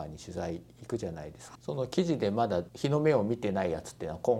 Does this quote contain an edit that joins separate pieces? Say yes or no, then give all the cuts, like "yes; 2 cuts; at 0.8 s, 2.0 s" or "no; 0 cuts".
yes; 2 cuts; at 1.5 s, 2.7 s